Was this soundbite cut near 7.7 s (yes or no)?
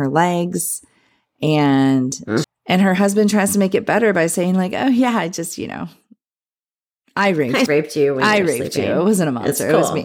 yes